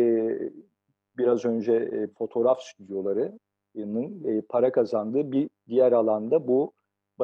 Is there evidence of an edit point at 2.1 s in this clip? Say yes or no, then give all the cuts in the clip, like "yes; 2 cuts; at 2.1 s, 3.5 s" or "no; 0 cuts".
yes; 1 cut; at 2.1 s